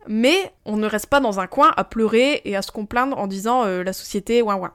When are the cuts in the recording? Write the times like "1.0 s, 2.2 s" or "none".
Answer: none